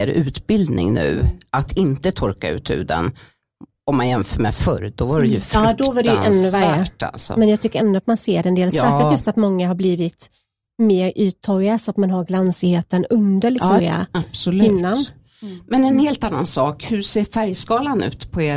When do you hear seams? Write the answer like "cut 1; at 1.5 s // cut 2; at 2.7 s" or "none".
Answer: cut 1; at 13.8 s